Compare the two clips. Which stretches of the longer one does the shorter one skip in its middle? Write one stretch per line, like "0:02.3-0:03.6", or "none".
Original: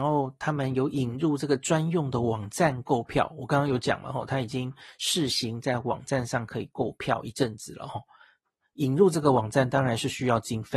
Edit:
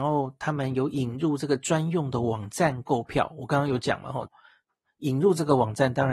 0:04.3-0:08.0